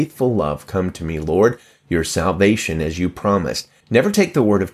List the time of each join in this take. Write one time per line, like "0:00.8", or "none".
0:03.8